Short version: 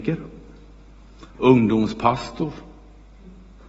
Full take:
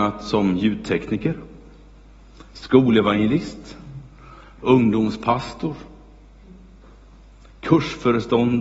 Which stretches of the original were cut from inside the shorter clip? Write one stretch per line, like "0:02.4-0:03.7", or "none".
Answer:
0:02.5-0:04.5